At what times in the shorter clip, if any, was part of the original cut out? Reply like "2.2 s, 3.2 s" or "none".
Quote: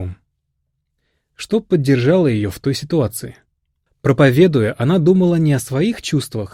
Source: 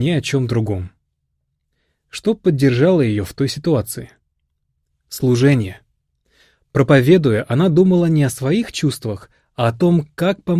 3.9 s

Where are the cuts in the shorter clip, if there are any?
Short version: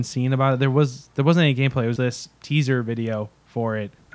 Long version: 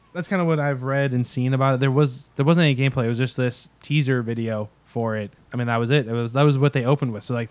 2.0 s

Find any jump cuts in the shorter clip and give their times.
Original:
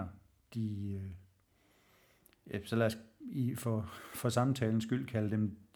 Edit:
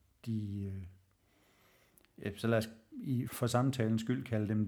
3.3 s

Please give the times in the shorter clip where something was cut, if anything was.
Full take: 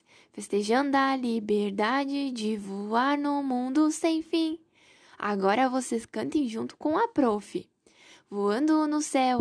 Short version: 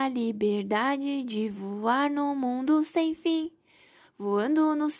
4.0 s

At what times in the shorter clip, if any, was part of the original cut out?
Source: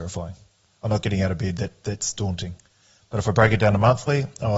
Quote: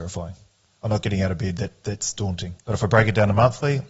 2.6 s

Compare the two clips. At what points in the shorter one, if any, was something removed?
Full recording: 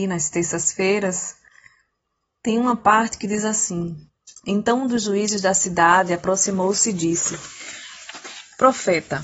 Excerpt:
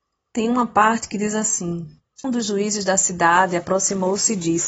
2.2 s

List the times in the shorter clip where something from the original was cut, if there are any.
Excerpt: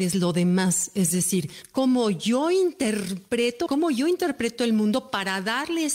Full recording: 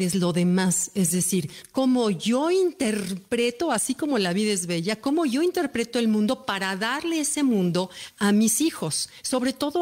3.7 s

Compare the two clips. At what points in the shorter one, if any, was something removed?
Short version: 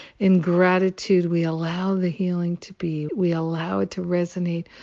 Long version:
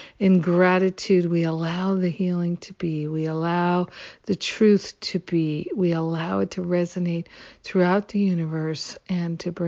3.1 s

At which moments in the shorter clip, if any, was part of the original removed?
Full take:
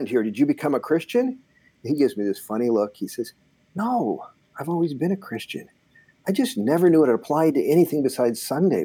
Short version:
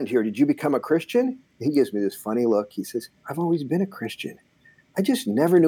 1.5 s, 3.2 s

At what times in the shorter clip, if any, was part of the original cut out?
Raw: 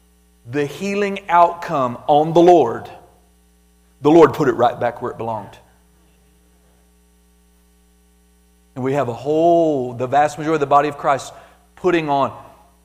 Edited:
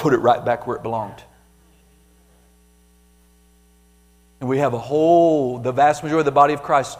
none

